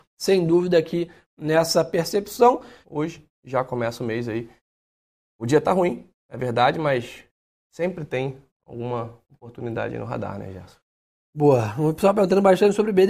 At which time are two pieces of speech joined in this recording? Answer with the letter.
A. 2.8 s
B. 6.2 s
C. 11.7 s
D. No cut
A